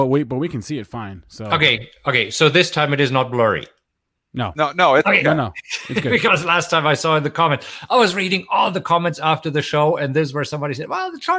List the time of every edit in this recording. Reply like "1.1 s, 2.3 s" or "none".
none